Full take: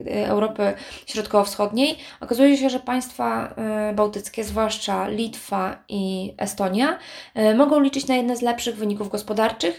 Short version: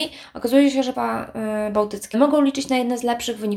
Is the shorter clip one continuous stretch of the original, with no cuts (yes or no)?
no